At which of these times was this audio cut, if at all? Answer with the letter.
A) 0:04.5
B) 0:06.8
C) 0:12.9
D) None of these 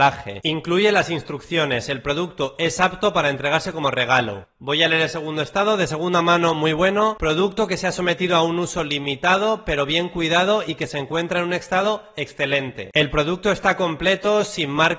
D